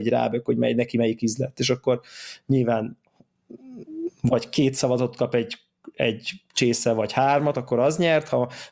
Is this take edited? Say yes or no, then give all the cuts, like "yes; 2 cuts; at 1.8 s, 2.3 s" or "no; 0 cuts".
no; 0 cuts